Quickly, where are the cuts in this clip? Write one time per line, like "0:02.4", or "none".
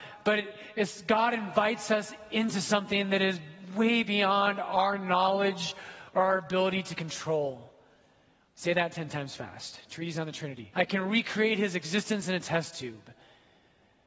0:08.5
0:10.7